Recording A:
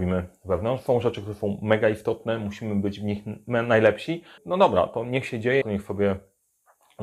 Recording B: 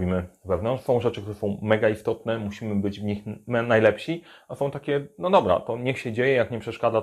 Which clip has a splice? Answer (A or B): A